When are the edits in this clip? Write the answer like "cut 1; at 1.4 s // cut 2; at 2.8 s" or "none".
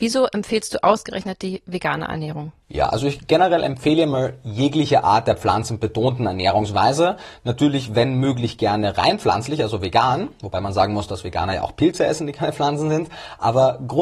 cut 1; at 2.6 s

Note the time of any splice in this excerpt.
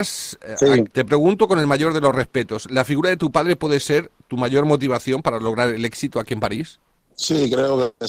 cut 1; at 0.9 s

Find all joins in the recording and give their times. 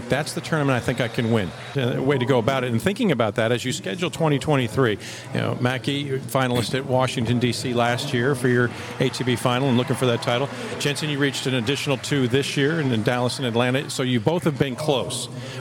cut 1; at 1.7 s

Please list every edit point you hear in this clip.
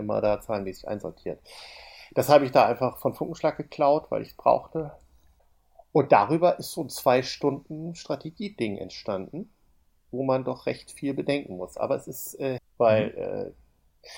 cut 1; at 12.6 s

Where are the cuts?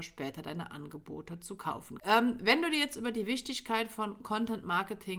cut 1; at 2.0 s

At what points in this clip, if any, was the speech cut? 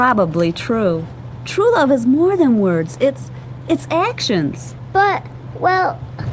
cut 1; at 1.4 s

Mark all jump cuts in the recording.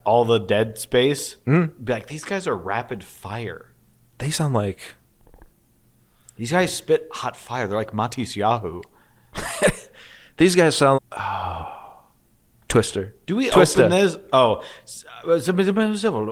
cut 1; at 10.9 s

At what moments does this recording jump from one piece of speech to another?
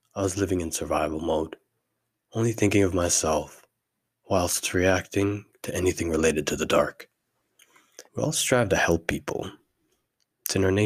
cut 1; at 8.1 s

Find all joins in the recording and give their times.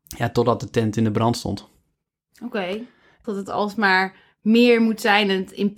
cut 1; at 3.2 s

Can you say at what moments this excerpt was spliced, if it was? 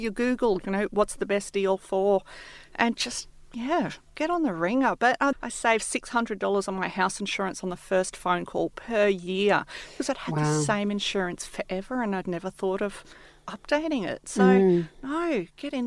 cut 1; at 5.3 s // cut 2; at 12.2 s

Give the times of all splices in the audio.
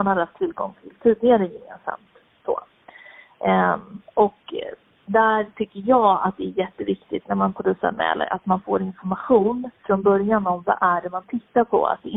none

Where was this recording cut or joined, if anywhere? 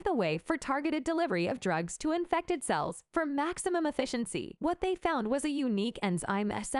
cut 1; at 4.6 s

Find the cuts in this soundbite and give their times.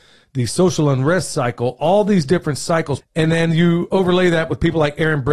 cut 1; at 3.0 s

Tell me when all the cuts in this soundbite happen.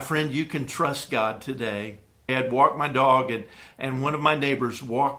cut 1; at 2.3 s

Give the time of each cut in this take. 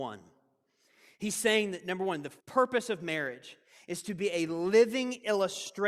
cut 1; at 2.4 s

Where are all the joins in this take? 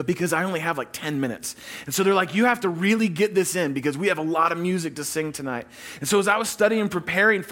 none

